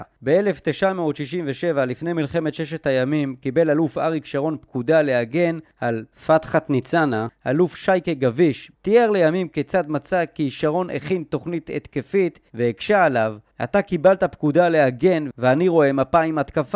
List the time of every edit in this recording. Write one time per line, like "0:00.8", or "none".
0:08.7
0:12.5